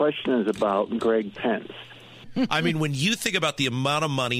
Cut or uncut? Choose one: cut